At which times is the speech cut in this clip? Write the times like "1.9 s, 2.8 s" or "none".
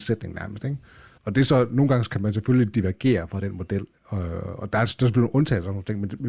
1.2 s